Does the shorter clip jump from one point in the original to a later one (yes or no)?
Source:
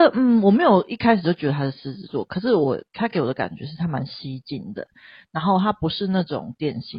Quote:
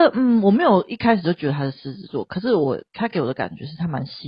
no